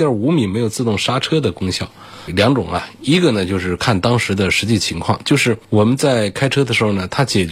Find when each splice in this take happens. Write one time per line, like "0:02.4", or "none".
none